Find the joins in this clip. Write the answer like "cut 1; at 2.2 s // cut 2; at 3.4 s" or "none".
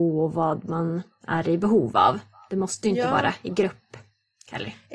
none